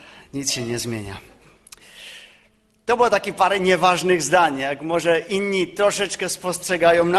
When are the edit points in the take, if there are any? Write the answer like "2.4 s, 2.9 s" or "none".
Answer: none